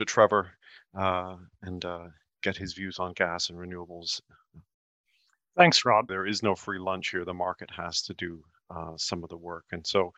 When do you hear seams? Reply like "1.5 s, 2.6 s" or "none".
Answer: 6.1 s